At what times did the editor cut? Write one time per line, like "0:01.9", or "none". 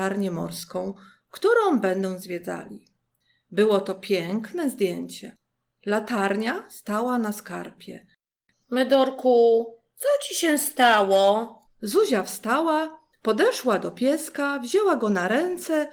0:08.5
0:11.7